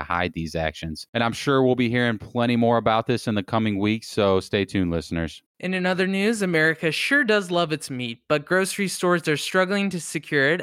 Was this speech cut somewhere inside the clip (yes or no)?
no